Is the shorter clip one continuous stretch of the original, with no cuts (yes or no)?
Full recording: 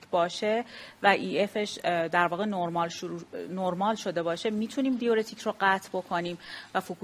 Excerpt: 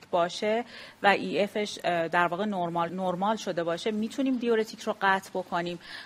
no